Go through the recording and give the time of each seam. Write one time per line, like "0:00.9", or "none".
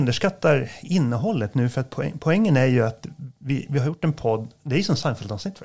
none